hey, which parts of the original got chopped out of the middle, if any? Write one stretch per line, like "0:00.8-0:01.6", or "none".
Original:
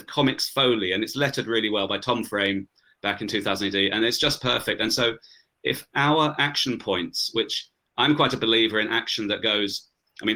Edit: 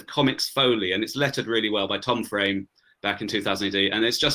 none